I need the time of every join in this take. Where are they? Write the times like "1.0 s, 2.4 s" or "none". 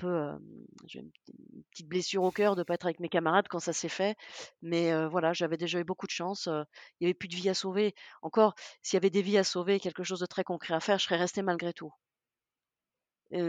none